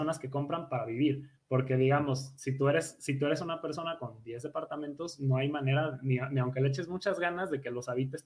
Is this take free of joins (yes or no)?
yes